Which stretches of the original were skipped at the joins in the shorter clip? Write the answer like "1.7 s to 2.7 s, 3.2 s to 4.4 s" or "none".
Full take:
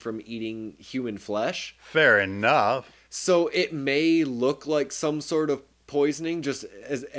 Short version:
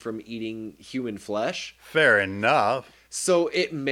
none